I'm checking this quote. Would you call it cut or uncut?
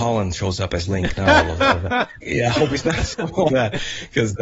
cut